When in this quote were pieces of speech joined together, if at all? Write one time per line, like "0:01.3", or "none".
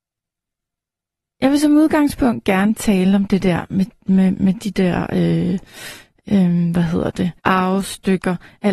0:04.3
0:07.4